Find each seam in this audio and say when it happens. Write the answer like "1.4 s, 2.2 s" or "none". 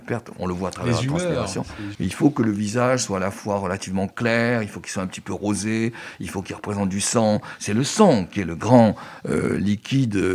1.9 s